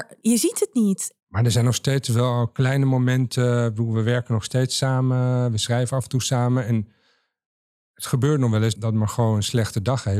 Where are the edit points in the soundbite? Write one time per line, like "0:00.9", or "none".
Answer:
0:01.2